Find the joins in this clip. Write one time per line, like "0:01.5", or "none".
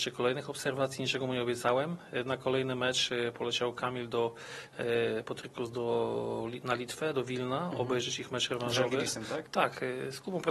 0:09.5